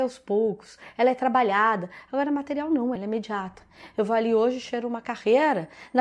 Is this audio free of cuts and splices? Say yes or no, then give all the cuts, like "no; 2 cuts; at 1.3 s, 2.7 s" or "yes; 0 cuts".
no; 1 cut; at 3.0 s